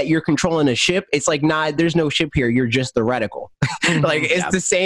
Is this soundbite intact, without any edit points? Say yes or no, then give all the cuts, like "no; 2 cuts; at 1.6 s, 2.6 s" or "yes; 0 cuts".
yes; 0 cuts